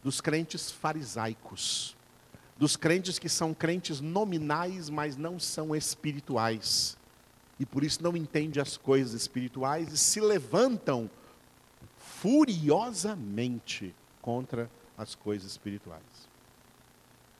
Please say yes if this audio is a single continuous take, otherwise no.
yes